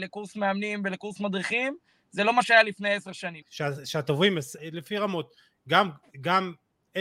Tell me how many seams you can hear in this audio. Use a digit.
2